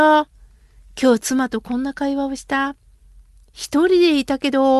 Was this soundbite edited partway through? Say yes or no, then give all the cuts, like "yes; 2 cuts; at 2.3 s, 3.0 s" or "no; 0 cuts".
no; 0 cuts